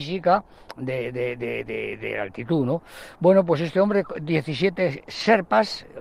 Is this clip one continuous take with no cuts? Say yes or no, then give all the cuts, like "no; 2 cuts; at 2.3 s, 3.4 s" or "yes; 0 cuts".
yes; 0 cuts